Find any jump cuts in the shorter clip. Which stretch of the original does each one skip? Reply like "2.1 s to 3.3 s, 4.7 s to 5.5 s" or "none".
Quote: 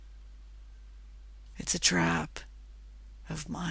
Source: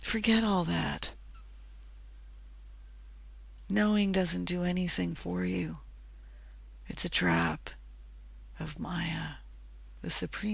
3.7 s to 6.8 s